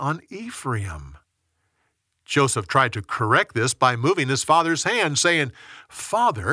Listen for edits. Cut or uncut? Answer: uncut